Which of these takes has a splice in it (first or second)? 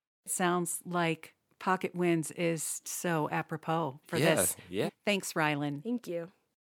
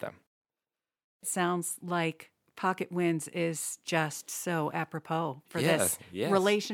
first